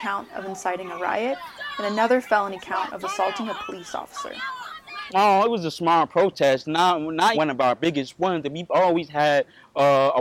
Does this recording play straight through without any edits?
no; 2 cuts; at 5.1 s, 7.3 s

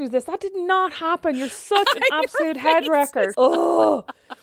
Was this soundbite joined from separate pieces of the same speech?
yes; 1 cut; at 3.3 s

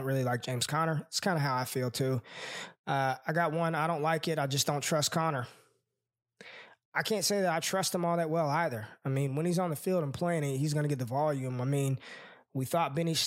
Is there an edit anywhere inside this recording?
no; 0 cuts

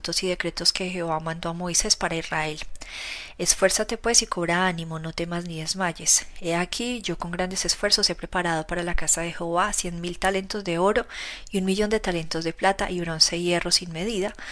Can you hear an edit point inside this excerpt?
no; 0 cuts

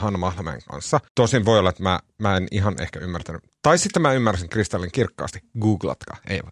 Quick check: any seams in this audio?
yes; 1 cut; at 1.1 s

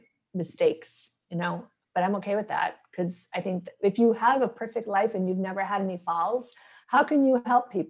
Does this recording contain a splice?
yes; 1 cut; at 1.8 s

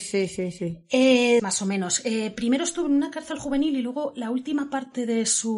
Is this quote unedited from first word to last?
no; 1 cut; at 1.4 s

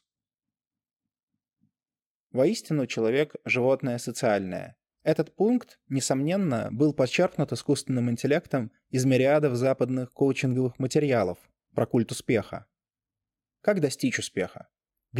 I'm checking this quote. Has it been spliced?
yes; 2 cuts; at 2.3 s, 4.9 s

